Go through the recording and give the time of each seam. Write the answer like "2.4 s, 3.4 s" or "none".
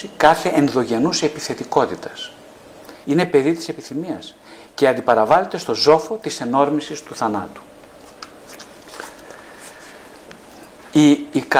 3.0 s